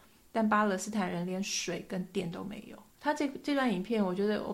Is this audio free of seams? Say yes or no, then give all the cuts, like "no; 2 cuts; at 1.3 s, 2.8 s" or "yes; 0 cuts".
no; 1 cut; at 2.9 s